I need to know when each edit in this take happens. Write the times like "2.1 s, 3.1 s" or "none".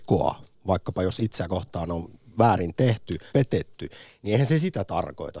3.3 s